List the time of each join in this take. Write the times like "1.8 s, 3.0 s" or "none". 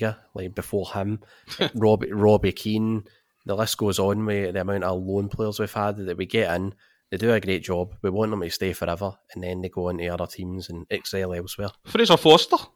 none